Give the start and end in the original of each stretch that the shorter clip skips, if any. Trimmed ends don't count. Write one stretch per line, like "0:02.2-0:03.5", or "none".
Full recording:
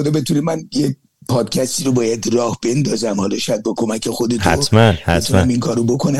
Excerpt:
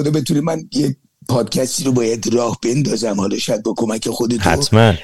none